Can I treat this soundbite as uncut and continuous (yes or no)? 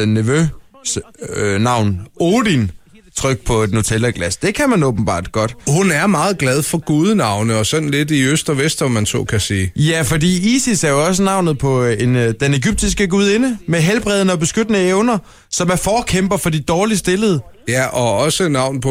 yes